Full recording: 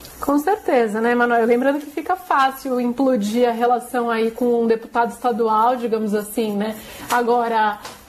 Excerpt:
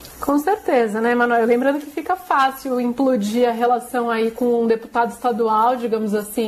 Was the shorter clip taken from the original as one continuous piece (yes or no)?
yes